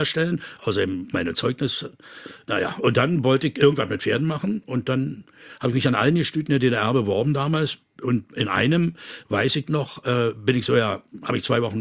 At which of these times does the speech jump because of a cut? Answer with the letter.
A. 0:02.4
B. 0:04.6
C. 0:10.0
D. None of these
D